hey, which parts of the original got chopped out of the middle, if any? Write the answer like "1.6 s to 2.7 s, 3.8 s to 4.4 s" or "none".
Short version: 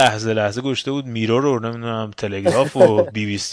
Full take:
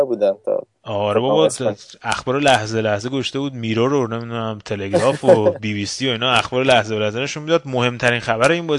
none